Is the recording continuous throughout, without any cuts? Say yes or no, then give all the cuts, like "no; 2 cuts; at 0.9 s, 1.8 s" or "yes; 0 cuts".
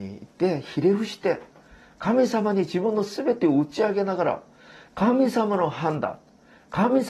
yes; 0 cuts